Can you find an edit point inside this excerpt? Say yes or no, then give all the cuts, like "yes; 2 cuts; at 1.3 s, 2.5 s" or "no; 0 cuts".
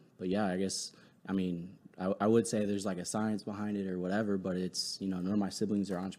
no; 0 cuts